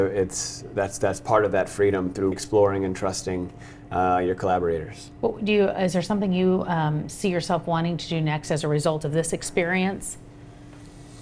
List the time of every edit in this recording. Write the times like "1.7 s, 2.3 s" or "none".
2.3 s